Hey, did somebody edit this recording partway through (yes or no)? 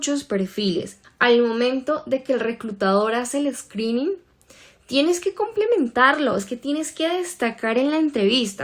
yes